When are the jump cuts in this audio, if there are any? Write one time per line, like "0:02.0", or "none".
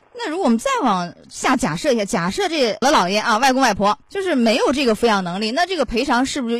0:02.8
0:04.0